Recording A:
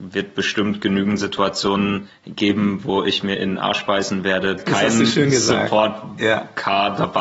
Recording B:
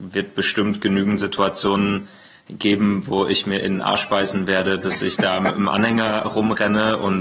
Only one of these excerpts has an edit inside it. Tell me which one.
A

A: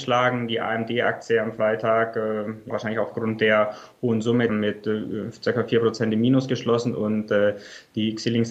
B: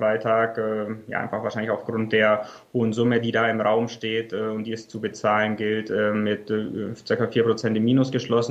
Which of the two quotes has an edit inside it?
A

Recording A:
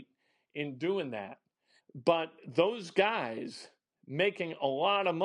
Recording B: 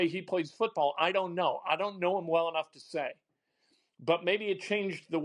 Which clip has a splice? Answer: A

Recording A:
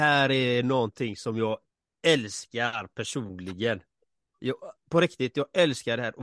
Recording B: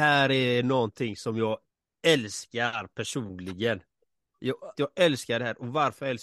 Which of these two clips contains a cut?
B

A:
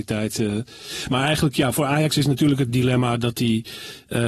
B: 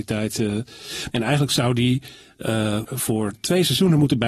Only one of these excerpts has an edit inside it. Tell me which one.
B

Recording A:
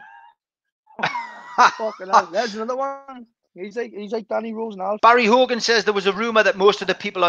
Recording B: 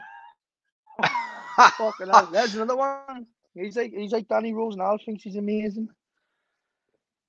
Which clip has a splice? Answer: A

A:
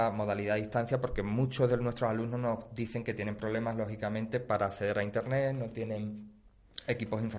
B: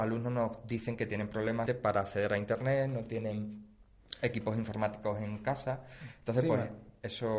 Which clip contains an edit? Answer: B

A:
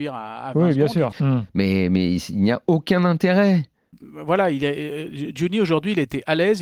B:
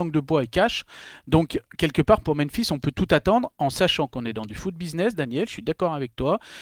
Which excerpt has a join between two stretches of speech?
A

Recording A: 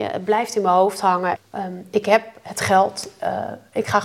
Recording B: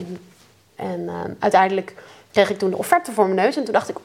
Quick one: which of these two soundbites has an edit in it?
A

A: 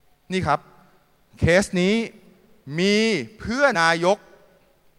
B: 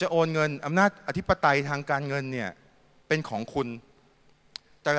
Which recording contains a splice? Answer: A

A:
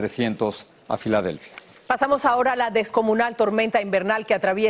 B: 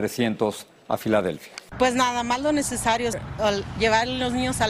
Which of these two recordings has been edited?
B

